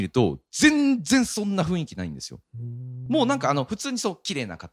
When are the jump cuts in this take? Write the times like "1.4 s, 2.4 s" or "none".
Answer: none